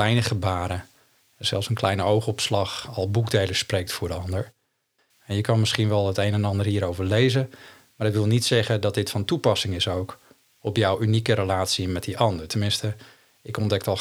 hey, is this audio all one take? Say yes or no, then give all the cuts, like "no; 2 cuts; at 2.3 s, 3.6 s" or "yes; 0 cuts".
no; 1 cut; at 5.1 s